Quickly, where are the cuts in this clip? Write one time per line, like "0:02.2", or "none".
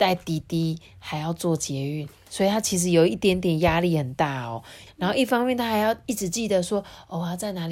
0:04.9